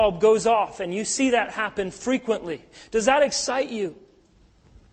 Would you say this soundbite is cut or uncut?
uncut